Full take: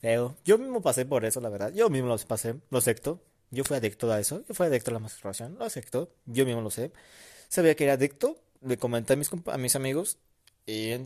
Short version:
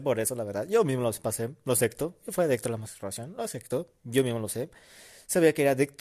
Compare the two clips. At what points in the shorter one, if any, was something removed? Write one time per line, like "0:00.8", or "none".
0:02.2